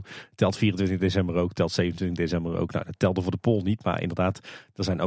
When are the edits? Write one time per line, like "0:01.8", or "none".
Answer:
none